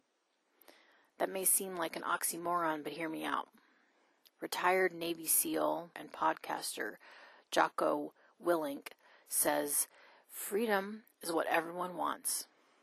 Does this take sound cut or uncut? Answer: cut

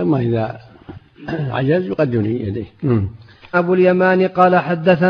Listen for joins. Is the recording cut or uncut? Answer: cut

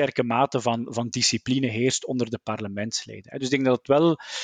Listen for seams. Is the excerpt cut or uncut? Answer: uncut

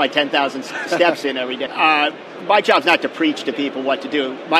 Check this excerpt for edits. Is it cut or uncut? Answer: cut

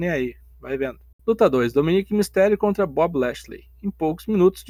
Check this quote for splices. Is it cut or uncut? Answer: cut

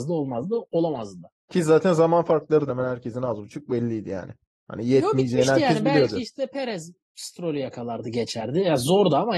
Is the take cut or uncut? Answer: cut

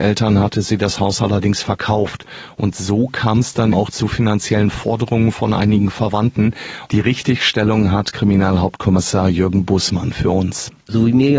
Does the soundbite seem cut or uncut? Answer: cut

